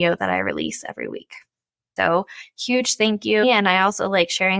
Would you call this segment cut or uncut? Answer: cut